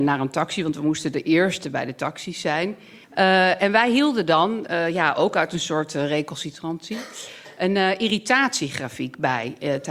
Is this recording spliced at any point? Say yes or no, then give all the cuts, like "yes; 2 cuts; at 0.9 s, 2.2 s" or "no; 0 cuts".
yes; 1 cut; at 3.0 s